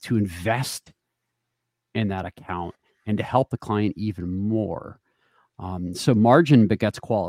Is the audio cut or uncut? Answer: uncut